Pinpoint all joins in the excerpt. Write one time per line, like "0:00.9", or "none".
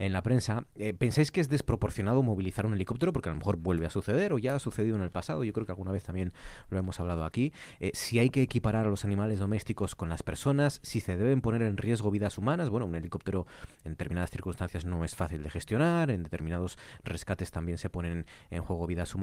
none